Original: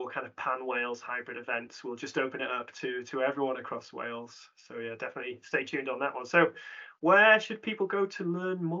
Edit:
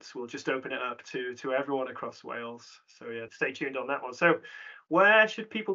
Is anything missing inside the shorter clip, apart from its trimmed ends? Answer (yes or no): yes